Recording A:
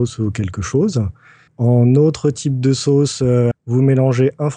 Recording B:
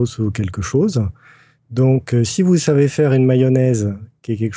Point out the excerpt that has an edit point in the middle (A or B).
A